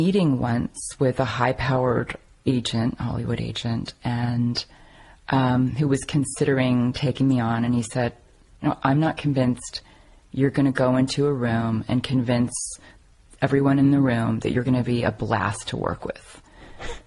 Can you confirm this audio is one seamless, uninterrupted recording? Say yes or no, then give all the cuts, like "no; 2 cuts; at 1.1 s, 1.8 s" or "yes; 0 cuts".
yes; 0 cuts